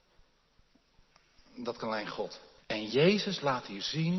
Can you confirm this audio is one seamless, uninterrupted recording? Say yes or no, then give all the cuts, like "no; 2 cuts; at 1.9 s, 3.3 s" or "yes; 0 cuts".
no; 1 cut; at 2.6 s